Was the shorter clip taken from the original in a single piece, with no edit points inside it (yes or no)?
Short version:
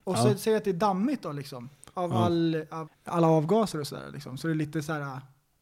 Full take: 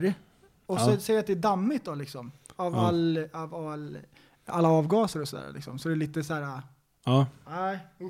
no